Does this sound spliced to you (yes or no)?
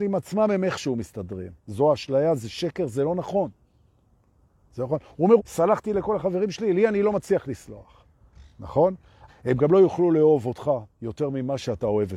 yes